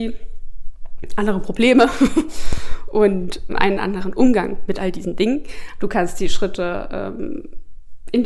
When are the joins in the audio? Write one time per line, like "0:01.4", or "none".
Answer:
0:03.5
0:05.8